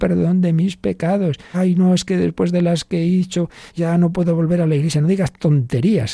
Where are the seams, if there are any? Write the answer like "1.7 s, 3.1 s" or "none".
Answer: 1.5 s, 3.7 s